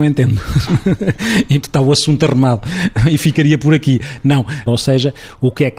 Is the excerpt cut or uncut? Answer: cut